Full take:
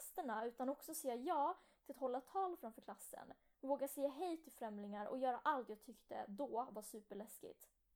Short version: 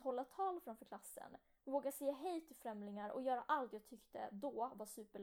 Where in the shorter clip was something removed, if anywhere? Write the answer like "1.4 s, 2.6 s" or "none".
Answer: none